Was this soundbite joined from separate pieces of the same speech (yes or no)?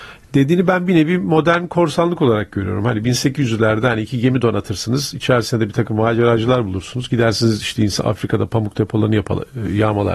no